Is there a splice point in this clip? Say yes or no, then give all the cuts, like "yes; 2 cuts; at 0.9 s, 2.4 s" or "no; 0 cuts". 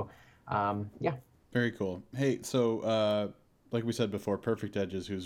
no; 0 cuts